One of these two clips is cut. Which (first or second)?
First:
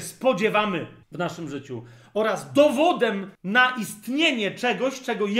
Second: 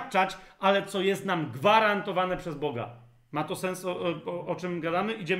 first